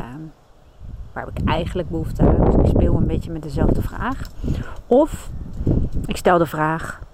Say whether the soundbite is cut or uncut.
uncut